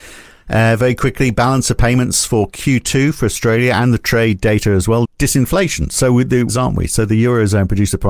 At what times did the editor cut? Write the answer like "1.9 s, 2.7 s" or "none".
5.0 s, 6.5 s